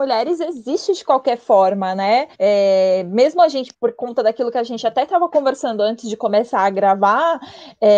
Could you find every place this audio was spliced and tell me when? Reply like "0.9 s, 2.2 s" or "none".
2.3 s, 3.7 s